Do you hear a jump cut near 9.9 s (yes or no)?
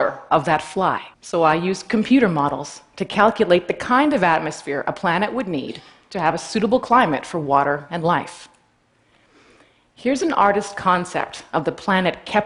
no